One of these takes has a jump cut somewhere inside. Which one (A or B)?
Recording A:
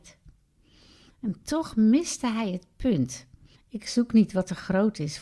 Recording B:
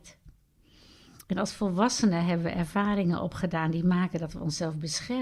A